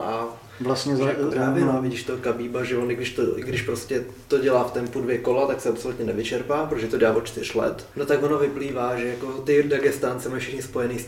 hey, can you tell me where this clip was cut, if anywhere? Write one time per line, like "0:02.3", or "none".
0:01.3
0:07.9